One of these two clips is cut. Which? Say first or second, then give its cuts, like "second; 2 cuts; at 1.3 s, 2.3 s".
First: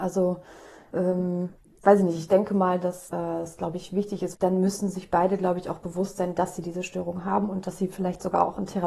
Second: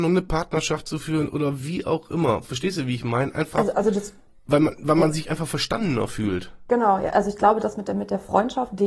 first; 2 cuts; at 3.1 s, 4.4 s